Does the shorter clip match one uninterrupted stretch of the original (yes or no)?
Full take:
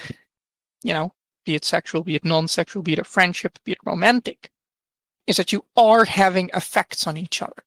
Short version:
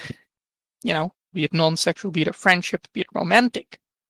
no